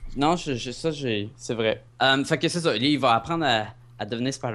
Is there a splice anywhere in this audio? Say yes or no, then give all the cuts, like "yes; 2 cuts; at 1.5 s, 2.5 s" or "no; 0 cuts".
yes; 1 cut; at 1.9 s